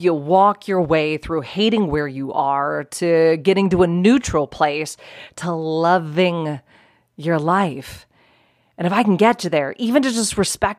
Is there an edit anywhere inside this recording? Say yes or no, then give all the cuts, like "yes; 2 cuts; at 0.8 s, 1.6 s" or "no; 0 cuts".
yes; 1 cut; at 5.3 s